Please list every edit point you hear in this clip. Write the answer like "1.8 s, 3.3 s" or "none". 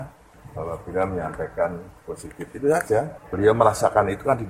none

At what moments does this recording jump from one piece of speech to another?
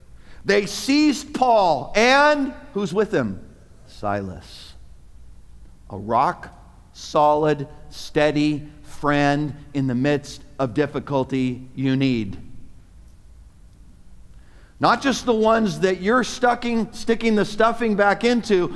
none

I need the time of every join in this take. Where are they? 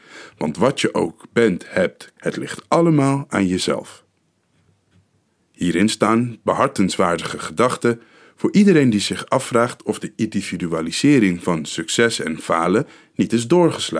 2.2 s, 5.4 s

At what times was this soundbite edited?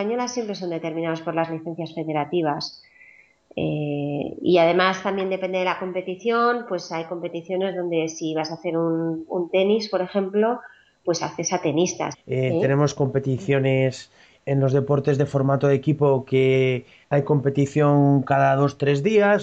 12.1 s

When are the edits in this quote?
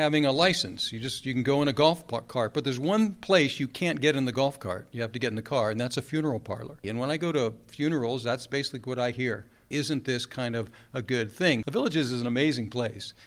6.8 s, 9.7 s, 11.6 s

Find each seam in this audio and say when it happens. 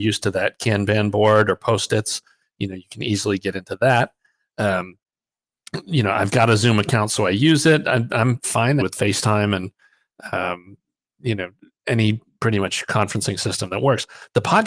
8.8 s

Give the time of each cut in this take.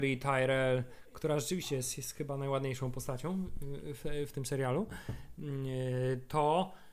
none

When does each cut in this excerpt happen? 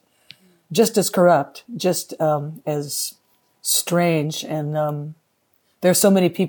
none

